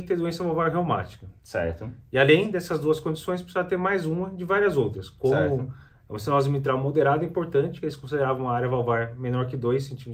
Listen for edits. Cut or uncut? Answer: uncut